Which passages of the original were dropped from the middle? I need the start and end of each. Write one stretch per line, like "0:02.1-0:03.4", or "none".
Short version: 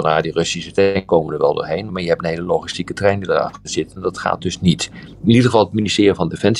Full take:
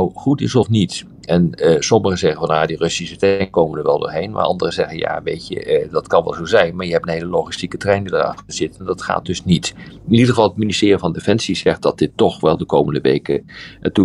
0:04.3-0:06.7